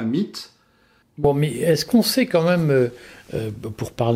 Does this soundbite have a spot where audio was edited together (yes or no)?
yes